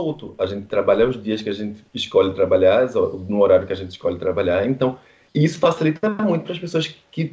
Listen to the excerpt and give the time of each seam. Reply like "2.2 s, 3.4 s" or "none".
none